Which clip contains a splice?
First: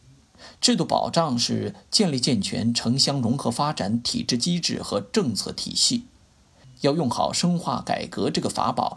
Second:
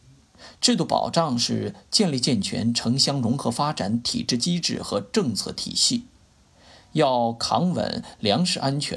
first; 1 cut; at 6.6 s

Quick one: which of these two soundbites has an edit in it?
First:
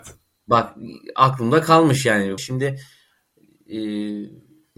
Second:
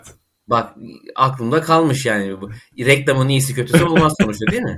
first; 1 cut; at 2.4 s

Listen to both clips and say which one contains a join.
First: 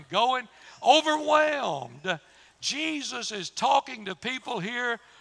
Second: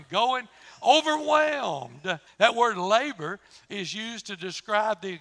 second; 1 cut; at 2.3 s

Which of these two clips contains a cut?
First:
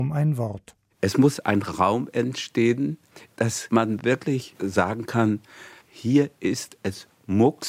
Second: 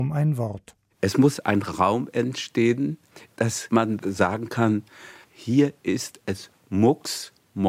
second; 1 cut; at 4.0 s

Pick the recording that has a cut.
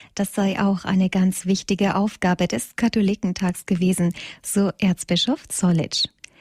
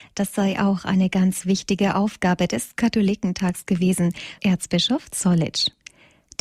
second; 1 cut; at 4.4 s

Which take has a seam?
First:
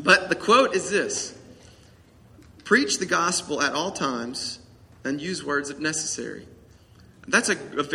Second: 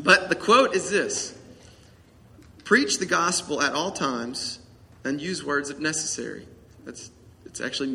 second; 1 cut; at 6.7 s

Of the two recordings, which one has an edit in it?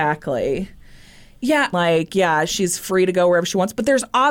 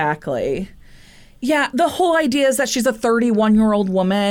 first; 1 cut; at 1.7 s

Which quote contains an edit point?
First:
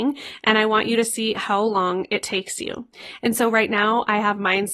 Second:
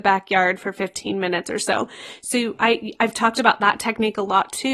first; 1 cut; at 3.2 s

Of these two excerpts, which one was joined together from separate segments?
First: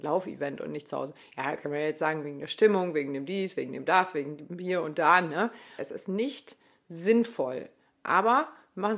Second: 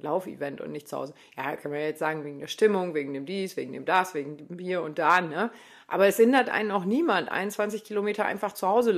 first; 1 cut; at 5.8 s

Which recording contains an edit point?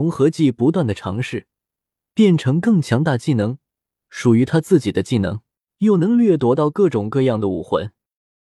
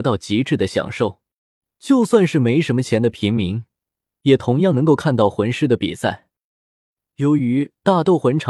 first; 1 cut; at 5.7 s

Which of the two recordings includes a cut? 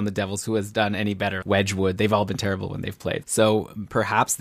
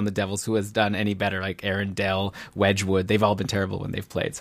first; 2 cuts; at 1.4 s, 3.2 s

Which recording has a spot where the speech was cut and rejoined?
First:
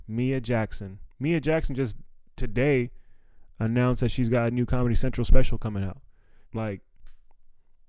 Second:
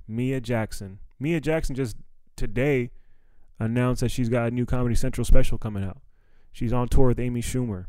first; 1 cut; at 6.4 s

